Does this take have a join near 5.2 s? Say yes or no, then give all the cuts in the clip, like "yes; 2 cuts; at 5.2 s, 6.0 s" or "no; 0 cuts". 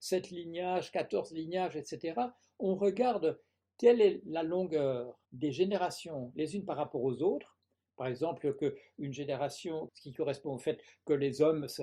yes; 2 cuts; at 5.2 s, 9.9 s